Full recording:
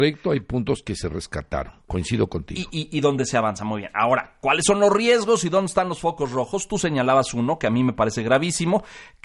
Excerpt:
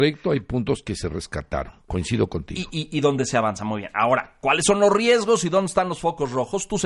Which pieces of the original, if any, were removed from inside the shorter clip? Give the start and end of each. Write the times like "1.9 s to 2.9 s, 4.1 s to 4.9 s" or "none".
none